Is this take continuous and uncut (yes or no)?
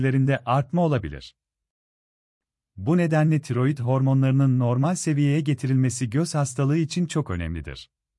yes